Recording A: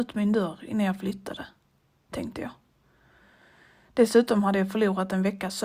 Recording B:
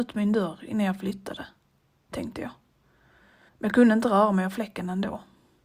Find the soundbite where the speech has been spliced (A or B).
B